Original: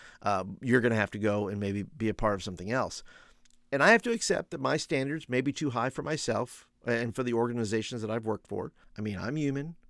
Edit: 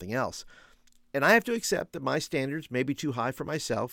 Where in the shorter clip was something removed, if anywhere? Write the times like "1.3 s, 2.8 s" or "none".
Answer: none